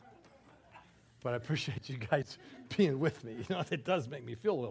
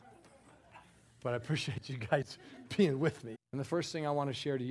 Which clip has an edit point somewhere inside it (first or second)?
second